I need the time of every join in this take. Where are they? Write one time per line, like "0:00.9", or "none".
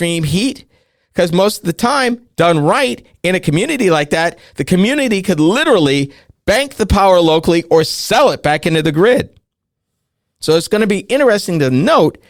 none